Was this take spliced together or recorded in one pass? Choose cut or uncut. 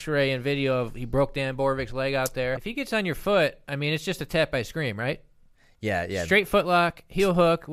cut